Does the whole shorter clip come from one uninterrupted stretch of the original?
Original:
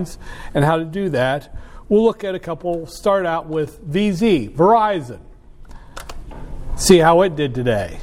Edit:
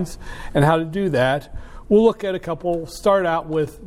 yes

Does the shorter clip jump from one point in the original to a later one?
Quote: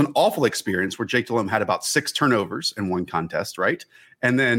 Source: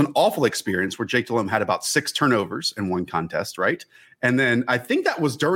no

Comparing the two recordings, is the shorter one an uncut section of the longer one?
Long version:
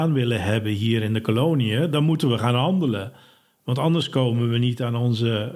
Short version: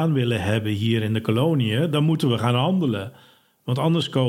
yes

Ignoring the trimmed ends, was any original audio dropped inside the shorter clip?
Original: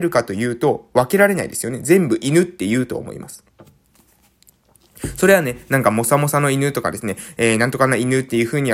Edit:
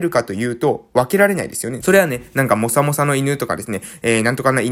yes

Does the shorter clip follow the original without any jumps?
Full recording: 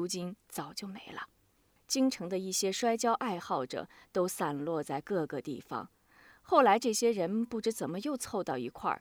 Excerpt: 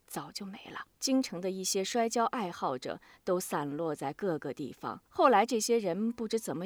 no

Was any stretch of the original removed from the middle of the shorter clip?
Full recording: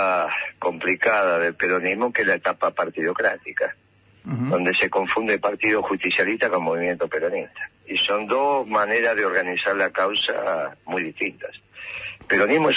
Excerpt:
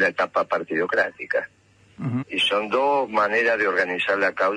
yes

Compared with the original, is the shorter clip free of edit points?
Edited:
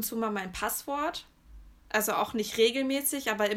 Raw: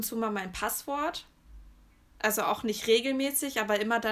no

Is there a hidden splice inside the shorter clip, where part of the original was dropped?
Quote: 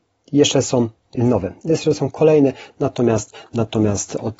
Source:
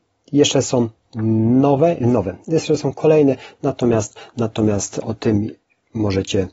yes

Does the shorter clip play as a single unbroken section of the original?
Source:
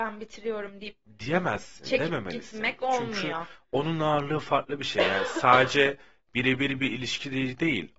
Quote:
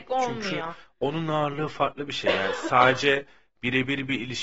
yes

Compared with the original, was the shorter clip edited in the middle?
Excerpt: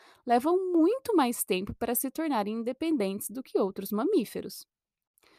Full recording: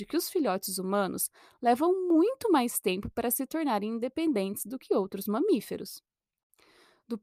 no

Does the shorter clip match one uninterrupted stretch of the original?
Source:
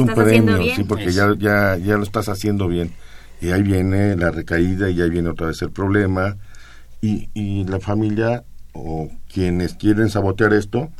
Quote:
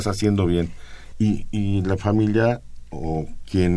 no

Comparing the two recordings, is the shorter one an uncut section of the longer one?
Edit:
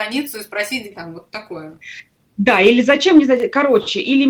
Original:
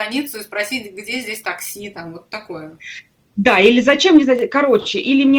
no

